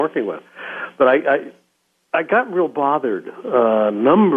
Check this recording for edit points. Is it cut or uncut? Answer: uncut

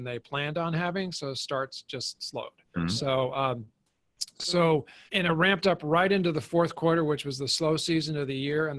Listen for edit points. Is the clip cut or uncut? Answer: cut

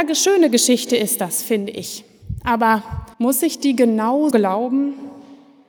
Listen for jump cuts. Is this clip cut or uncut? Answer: cut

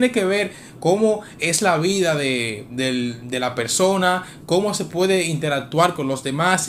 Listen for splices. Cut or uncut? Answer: cut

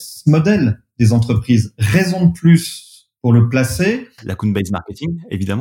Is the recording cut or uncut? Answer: cut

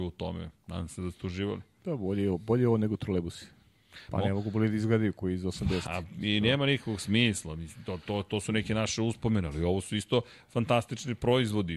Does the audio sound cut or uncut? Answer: cut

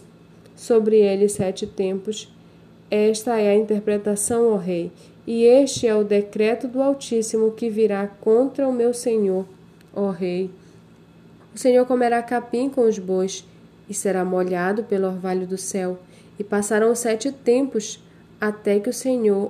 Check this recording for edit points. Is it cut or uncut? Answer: cut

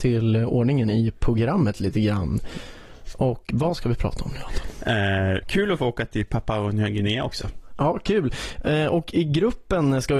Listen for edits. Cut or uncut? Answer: cut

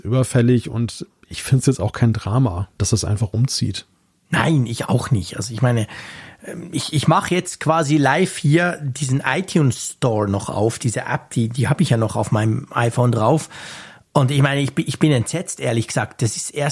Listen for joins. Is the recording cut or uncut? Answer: uncut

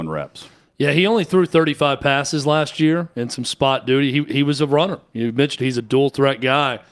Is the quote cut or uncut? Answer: uncut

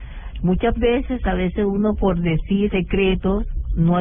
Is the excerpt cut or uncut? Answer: cut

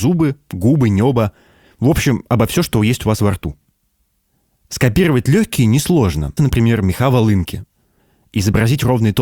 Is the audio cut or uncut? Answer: cut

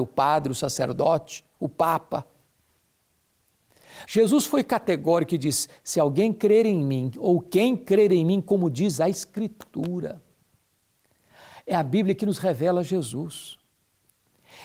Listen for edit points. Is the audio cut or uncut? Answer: cut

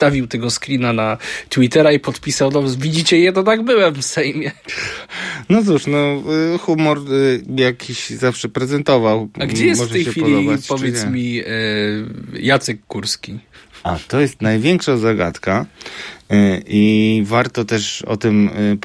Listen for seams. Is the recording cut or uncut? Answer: uncut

